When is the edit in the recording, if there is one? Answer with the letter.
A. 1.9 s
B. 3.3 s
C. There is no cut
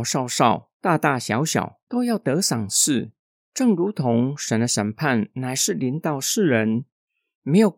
A